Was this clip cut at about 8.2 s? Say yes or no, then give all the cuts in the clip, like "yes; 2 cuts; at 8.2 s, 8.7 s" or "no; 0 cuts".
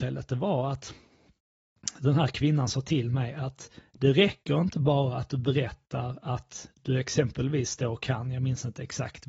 no; 0 cuts